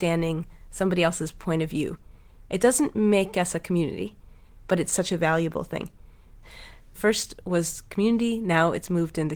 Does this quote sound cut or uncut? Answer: uncut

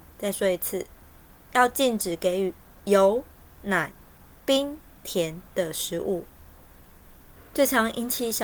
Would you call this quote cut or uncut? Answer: uncut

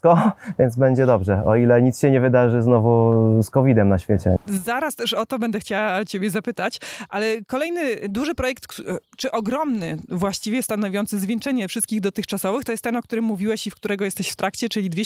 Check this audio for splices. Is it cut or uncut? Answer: cut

